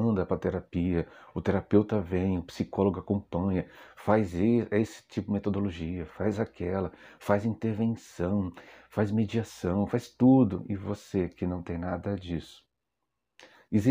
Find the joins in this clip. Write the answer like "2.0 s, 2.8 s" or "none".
none